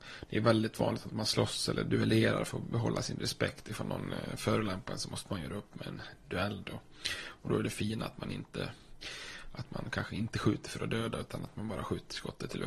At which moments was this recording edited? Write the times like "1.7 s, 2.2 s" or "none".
none